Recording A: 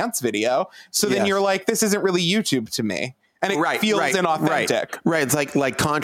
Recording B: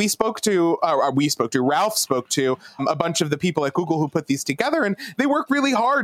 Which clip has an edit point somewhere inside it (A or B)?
B